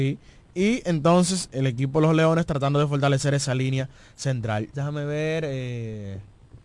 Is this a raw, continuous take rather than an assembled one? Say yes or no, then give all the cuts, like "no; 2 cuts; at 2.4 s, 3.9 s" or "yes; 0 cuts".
no; 2 cuts; at 1.5 s, 4.7 s